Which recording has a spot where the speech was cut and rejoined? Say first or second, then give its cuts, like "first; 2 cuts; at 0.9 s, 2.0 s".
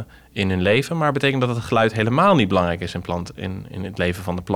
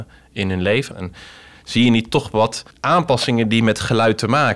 second; 2 cuts; at 0.9 s, 2.7 s